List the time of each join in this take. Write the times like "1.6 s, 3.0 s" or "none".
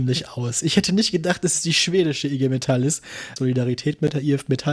3.4 s